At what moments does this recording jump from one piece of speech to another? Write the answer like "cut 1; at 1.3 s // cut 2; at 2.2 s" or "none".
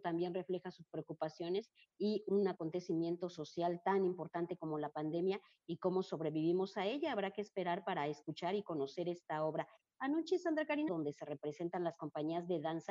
cut 1; at 10.9 s